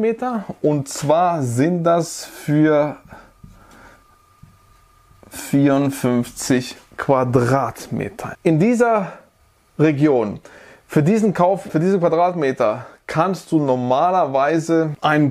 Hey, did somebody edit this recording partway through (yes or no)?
yes